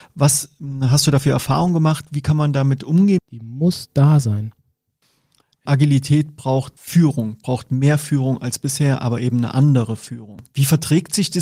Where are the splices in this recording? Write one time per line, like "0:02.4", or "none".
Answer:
0:03.2
0:05.7

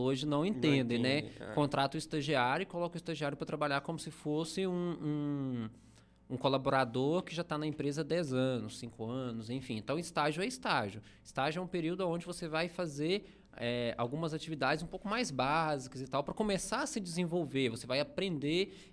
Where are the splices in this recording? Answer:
none

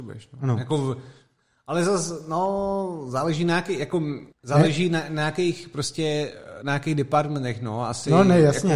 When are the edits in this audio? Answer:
0:04.3

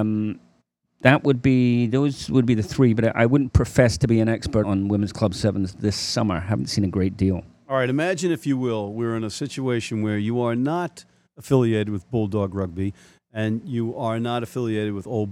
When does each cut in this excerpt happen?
0:04.6

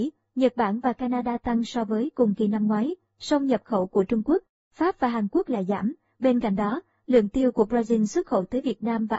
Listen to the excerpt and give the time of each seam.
0:06.1

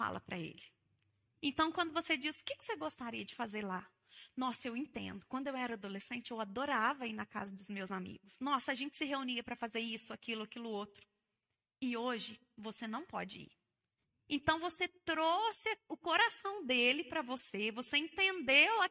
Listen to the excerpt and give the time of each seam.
none

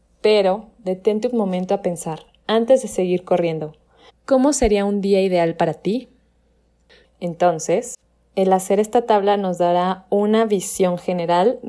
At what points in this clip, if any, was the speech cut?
0:04.1
0:07.0

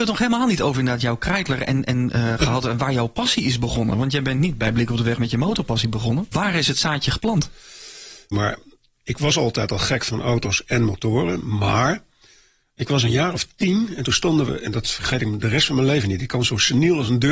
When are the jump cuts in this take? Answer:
0:06.3
0:08.3

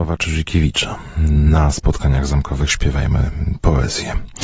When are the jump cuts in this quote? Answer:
none

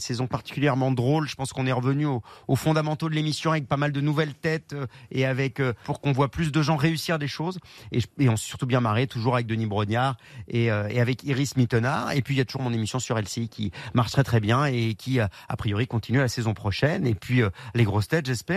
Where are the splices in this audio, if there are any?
0:05.8

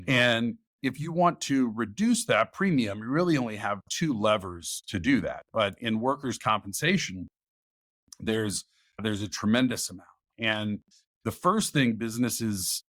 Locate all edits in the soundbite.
0:05.5

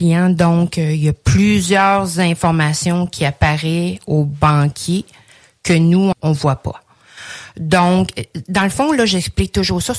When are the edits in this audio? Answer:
0:06.1

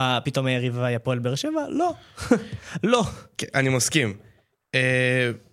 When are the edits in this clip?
none

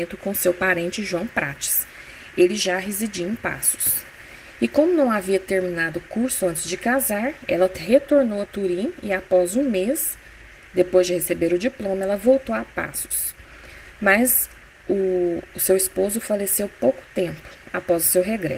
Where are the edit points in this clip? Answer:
none

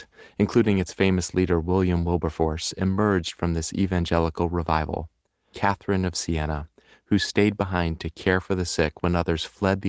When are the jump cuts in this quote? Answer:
0:05.5

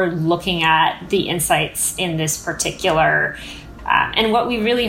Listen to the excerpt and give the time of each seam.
0:03.8

